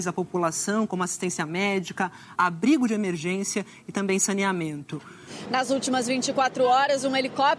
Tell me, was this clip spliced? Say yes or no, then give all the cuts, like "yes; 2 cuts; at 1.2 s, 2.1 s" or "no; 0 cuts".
yes; 2 cuts; at 2.4 s, 5.5 s